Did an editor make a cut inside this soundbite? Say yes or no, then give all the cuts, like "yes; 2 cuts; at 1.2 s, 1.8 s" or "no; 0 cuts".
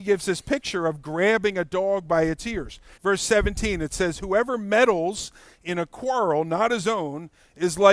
yes; 1 cut; at 3.0 s